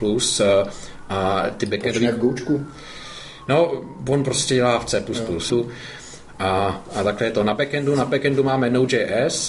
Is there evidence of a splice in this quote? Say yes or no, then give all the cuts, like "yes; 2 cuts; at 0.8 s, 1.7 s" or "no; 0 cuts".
yes; 1 cut; at 5.5 s